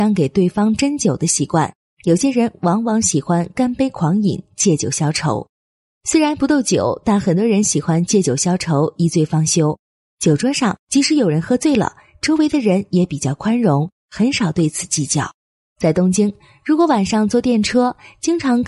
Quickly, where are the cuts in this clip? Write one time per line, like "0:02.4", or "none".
none